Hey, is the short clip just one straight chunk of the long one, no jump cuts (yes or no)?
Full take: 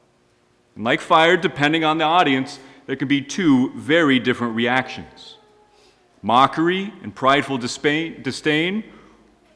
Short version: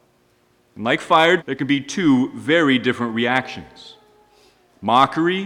no